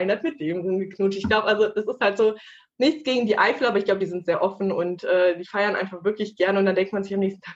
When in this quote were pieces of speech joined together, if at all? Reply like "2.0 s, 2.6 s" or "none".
none